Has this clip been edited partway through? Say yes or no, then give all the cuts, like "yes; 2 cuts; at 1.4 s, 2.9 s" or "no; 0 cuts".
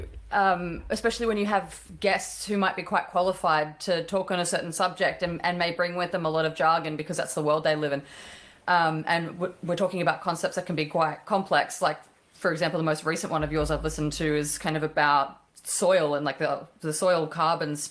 no; 0 cuts